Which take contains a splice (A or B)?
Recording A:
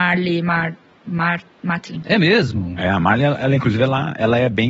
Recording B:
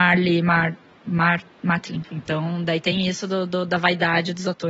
B